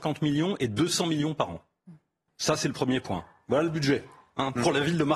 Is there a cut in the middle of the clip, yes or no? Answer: yes